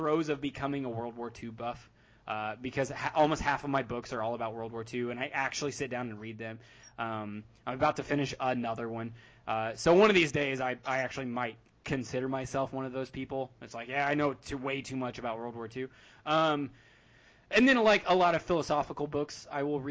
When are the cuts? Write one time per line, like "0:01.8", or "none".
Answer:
none